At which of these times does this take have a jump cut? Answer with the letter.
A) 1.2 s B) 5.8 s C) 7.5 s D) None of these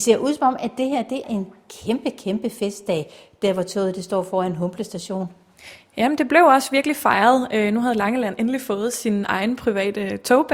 A